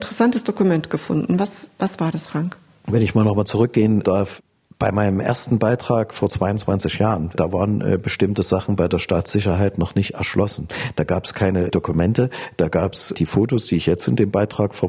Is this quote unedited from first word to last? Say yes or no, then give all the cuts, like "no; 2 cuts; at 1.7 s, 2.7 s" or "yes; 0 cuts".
yes; 0 cuts